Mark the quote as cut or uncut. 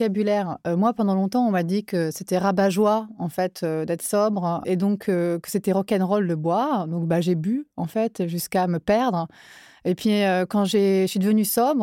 cut